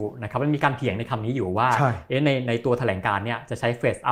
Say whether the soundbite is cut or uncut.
uncut